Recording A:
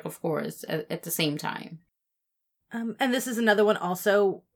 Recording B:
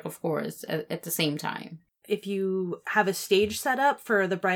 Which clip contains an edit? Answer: B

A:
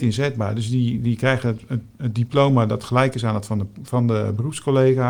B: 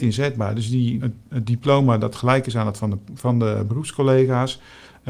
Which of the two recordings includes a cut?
B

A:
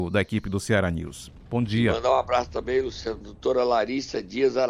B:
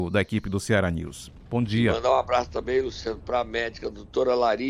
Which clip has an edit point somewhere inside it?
A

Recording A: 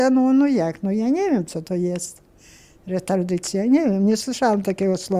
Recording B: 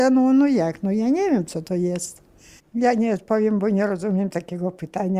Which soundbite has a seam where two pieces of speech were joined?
B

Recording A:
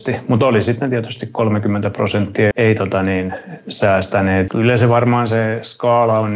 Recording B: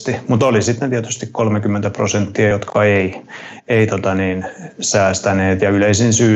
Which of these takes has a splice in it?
A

